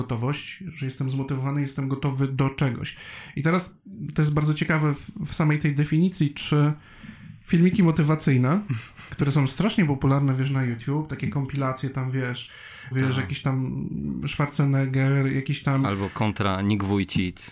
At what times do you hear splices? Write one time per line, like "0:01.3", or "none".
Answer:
0:12.9